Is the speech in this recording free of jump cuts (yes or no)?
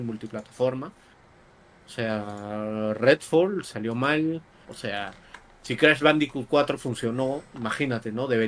no